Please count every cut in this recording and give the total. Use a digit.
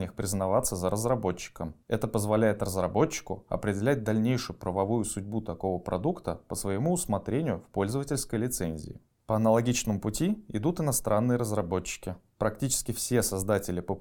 1